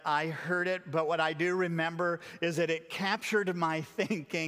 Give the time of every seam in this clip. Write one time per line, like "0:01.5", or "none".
none